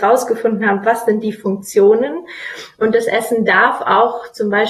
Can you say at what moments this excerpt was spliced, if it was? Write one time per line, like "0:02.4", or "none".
none